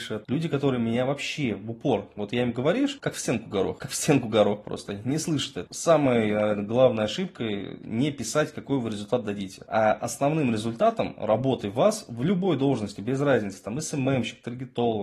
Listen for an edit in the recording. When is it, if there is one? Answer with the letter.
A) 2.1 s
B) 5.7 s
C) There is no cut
B